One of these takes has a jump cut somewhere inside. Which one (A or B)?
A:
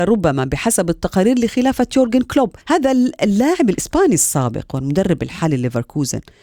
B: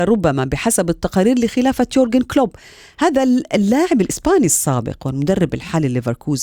A